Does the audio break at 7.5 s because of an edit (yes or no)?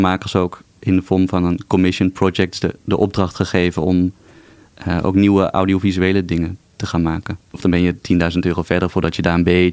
yes